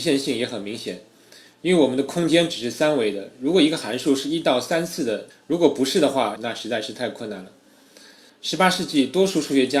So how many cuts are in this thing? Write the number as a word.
two